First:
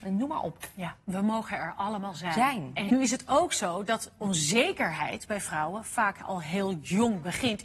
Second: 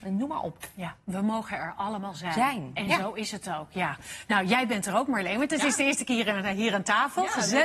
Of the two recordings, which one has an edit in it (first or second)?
first